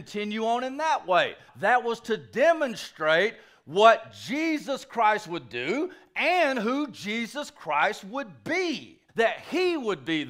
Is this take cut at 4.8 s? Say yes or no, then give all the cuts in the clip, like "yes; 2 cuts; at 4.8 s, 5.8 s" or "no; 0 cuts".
no; 2 cuts; at 1.5 s, 9.1 s